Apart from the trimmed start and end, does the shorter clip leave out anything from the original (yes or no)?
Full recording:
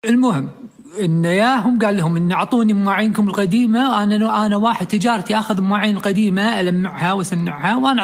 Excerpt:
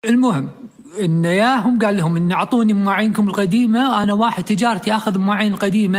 yes